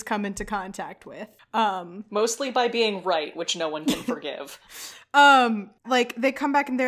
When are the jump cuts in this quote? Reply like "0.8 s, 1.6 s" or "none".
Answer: 5.8 s